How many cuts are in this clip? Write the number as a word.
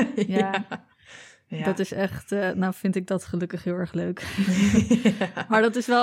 zero